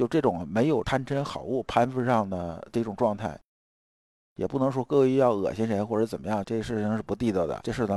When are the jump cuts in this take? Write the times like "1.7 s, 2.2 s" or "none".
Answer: 4.2 s, 6.4 s